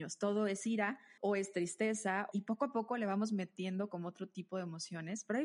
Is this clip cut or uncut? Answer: cut